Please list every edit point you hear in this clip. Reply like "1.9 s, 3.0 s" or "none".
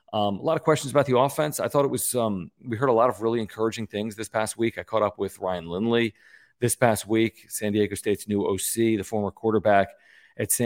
none